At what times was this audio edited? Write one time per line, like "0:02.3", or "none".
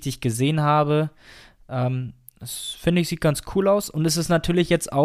none